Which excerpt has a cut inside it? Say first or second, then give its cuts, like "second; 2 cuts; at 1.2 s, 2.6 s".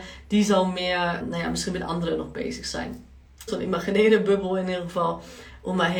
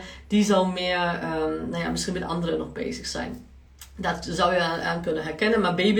first; 2 cuts; at 1.2 s, 3.5 s